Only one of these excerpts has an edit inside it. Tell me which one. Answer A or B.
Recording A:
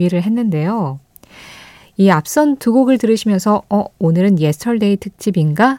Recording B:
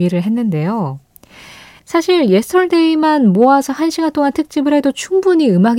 B